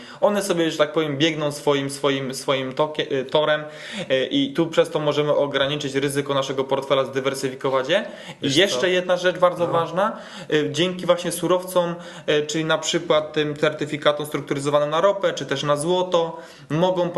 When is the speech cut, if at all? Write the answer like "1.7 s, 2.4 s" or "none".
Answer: none